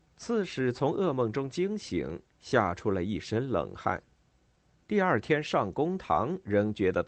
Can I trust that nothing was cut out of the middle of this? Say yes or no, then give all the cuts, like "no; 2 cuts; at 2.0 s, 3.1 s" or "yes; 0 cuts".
yes; 0 cuts